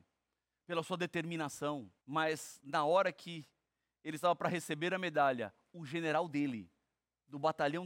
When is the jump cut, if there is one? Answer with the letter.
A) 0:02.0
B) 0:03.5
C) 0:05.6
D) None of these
A